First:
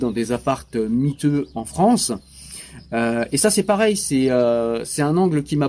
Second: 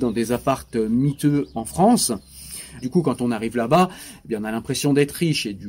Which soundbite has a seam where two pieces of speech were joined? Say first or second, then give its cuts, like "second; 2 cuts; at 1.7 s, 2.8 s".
second; 1 cut; at 2.8 s